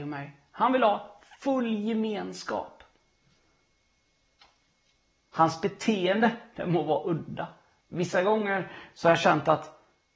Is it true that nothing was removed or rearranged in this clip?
no; 1 cut; at 7.8 s

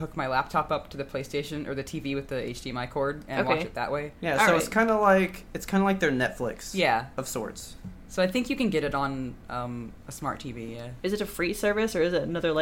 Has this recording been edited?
no; 0 cuts

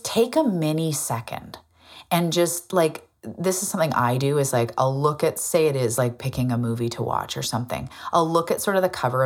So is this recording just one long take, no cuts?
yes; 0 cuts

